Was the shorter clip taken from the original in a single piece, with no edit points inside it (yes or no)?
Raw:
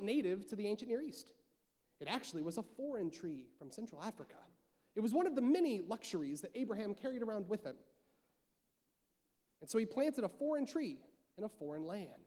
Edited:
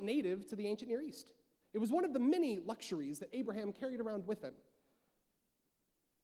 no